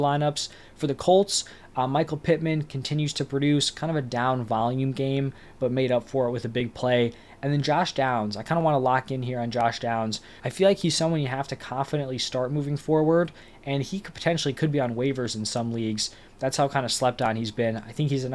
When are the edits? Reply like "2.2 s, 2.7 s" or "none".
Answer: 10.4 s